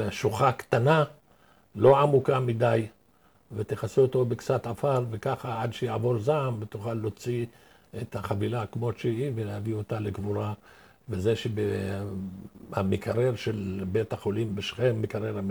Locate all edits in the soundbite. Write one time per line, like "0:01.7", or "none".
none